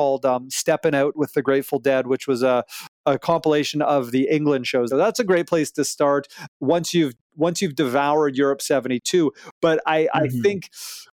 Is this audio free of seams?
no; 1 cut; at 4.9 s

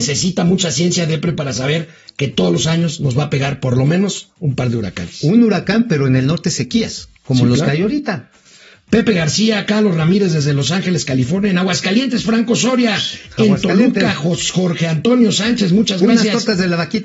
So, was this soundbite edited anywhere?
no; 0 cuts

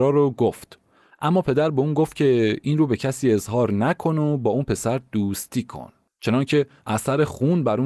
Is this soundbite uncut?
no; 1 cut; at 6.1 s

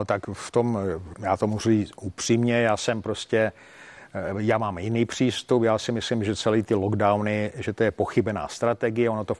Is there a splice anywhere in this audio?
yes; 1 cut; at 1.1 s

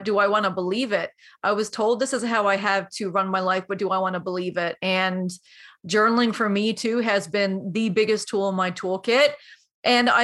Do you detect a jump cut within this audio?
no; 0 cuts

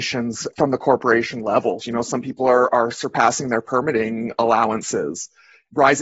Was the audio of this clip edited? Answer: yes; 1 cut; at 1.8 s

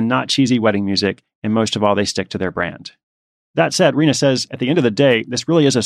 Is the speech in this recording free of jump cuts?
yes; 0 cuts

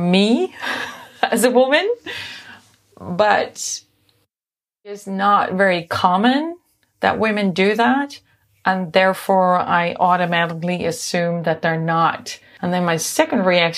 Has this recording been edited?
yes; 1 cut; at 12.6 s

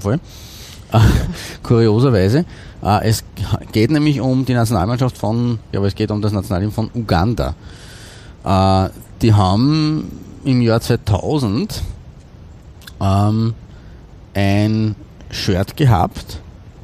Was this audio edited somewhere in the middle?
yes; 1 cut; at 5.7 s

